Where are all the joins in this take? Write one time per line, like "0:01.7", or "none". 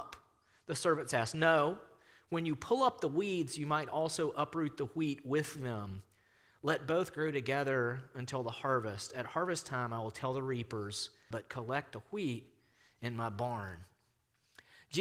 0:11.3